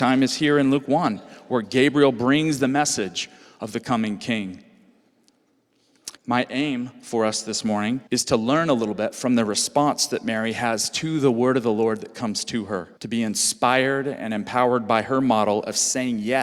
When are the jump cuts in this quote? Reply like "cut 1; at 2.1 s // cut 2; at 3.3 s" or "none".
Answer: cut 1; at 6.2 s // cut 2; at 8.1 s // cut 3; at 13.0 s

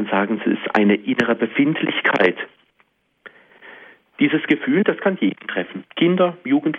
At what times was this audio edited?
cut 1; at 5.9 s

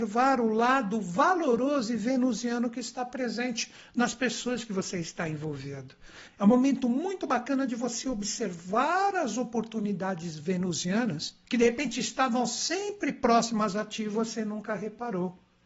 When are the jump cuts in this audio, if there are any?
cut 1; at 6.3 s // cut 2; at 11.4 s

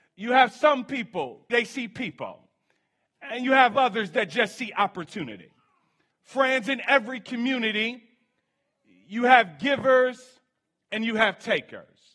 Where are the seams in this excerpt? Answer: cut 1; at 1.5 s // cut 2; at 6.1 s

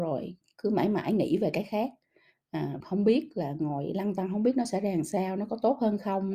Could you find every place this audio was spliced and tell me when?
cut 1; at 2.8 s

